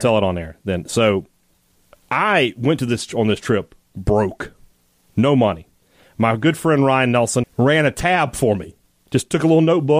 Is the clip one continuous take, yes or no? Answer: no